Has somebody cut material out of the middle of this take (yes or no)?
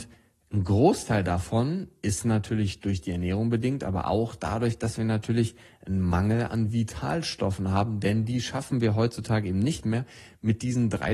no